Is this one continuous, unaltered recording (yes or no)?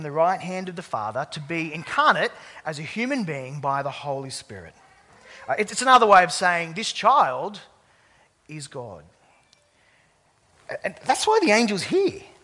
yes